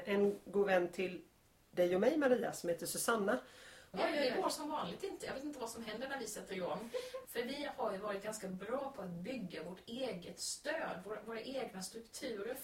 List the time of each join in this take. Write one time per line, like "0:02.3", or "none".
0:03.9
0:07.2

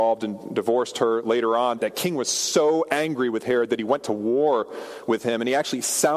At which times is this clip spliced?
0:01.8

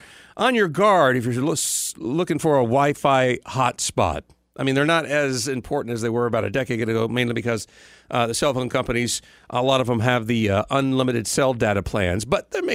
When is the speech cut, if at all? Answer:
none

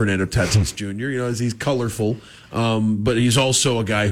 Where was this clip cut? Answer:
none

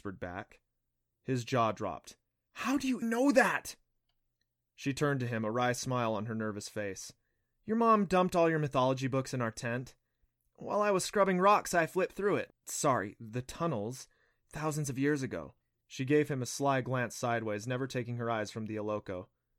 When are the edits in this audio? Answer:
0:03.0
0:12.5
0:15.8

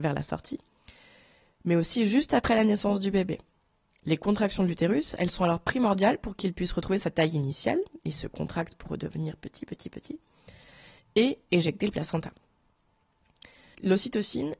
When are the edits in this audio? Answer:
none

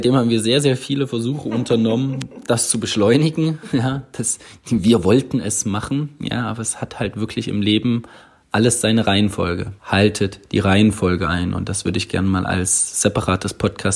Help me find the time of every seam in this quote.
0:09.8

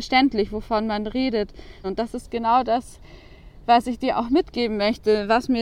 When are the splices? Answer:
0:01.8

